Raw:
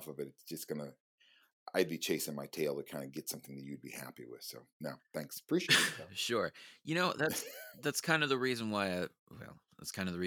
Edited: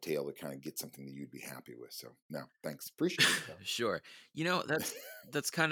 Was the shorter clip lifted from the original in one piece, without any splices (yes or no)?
yes